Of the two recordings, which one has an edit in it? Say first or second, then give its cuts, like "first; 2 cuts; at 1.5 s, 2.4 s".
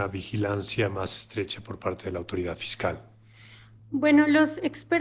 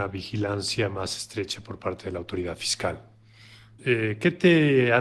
second; 1 cut; at 3.8 s